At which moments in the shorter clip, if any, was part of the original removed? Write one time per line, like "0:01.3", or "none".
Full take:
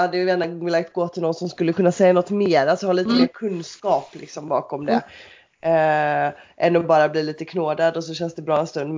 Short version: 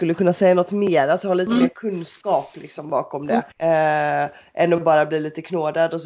0:03.5